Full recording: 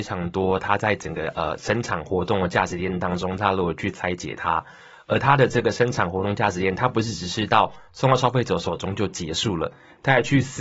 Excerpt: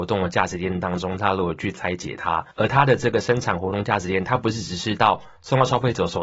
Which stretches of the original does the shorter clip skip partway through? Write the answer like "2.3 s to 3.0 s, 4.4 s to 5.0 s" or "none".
4.7 s to 5.0 s